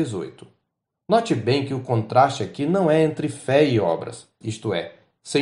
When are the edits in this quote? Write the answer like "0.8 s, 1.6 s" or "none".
4.4 s